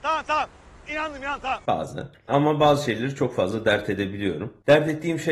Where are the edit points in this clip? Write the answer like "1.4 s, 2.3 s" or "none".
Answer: 1.6 s